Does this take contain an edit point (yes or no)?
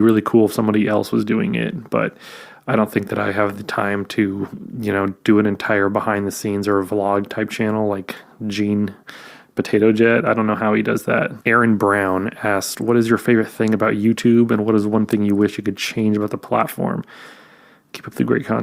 yes